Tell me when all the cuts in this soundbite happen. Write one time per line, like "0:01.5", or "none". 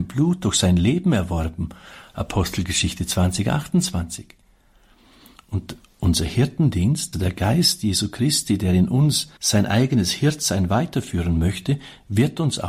0:07.1
0:09.4